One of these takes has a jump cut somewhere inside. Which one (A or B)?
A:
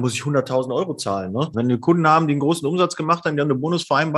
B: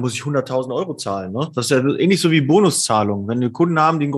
A